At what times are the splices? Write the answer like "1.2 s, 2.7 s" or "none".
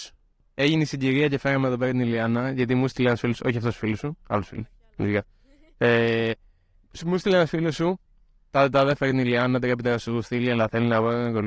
none